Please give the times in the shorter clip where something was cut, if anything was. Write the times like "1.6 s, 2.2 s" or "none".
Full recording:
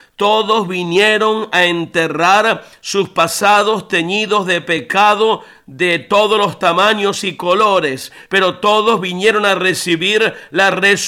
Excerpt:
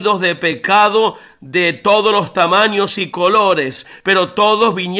none